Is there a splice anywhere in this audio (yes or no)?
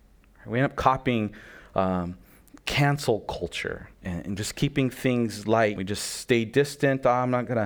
yes